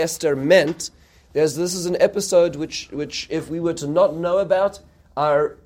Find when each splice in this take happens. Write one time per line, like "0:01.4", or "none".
none

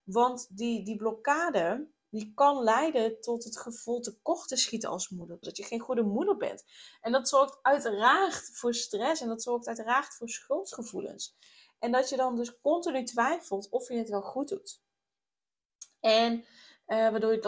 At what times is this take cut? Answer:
0:05.4

